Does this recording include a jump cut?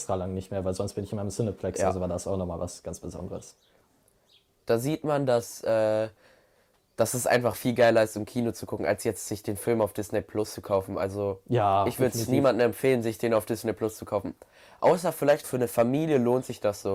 yes; 1 cut; at 15.4 s

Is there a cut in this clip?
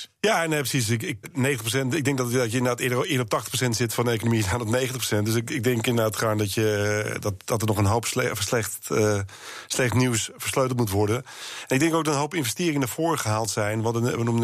yes; 1 cut; at 1.2 s

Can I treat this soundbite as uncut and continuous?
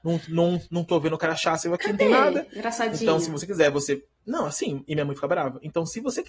yes; 0 cuts

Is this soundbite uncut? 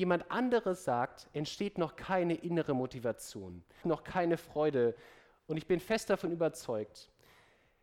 no; 1 cut; at 3.8 s

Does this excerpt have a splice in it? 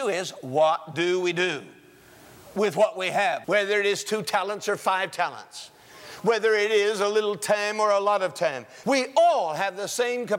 yes; 2 cuts; at 3.4 s, 8.8 s

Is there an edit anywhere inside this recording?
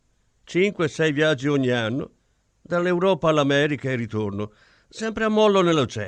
no; 0 cuts

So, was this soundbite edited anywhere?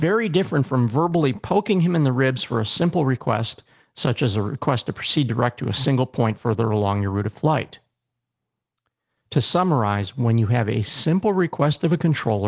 no; 0 cuts

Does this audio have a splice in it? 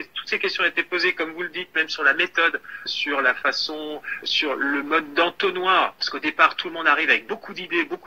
yes; 2 cuts; at 2.9 s, 4.2 s

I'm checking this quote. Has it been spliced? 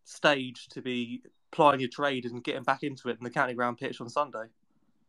no; 0 cuts

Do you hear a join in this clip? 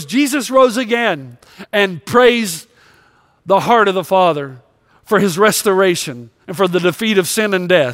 no; 0 cuts

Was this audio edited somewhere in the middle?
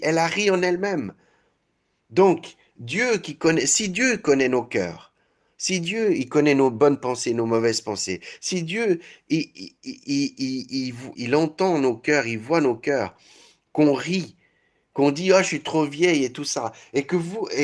yes; 1 cut; at 11.1 s

